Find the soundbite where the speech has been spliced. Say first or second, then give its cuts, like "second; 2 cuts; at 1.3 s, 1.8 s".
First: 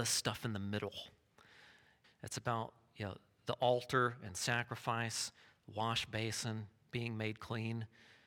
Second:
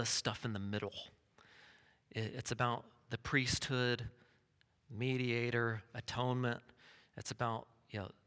first; 1 cut; at 2.0 s